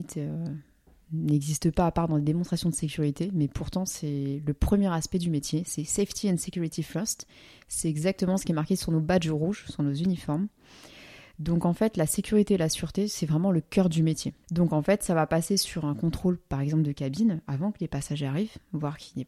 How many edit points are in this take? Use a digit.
1